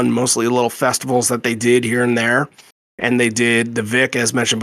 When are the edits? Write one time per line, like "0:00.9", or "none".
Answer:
0:03.1

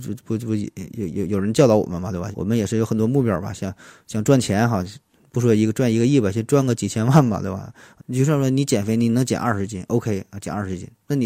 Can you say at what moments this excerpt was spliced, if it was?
0:02.3
0:08.0

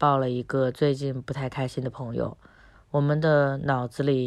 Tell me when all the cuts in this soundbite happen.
0:02.7

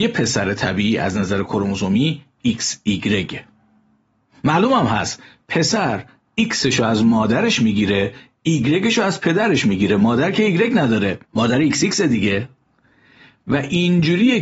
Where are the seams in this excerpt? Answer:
0:11.2

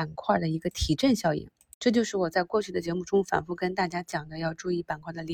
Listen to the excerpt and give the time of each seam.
none

